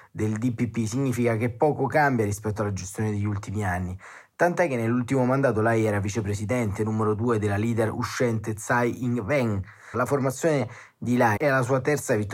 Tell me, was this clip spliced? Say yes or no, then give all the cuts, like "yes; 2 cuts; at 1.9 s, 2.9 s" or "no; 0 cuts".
yes; 2 cuts; at 9.9 s, 11.4 s